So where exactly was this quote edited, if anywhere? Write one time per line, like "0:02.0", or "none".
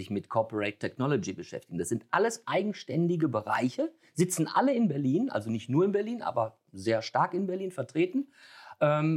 none